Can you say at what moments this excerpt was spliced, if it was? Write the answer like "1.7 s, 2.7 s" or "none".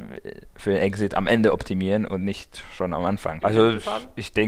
3.4 s